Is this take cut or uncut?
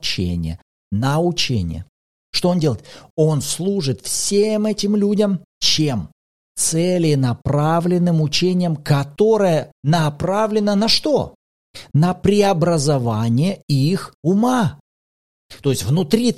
uncut